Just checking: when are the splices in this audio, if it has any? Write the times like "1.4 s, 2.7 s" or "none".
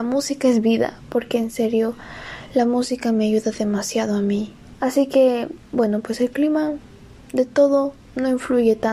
4.7 s